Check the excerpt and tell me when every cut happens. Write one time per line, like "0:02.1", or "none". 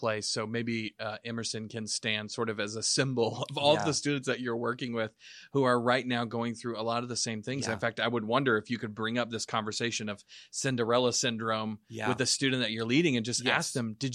none

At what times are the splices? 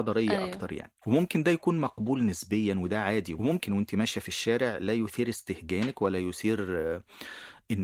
0:01.0

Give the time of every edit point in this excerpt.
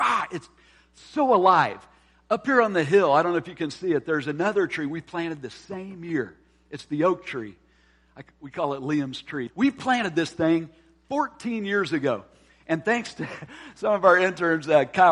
0:09.5

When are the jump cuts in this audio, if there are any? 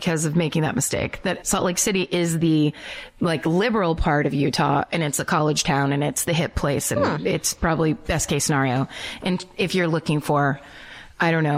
0:01.4

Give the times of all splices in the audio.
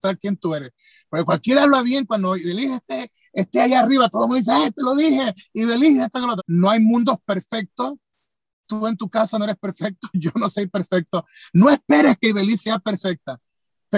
0:06.4

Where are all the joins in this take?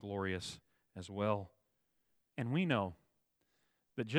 0:02.3

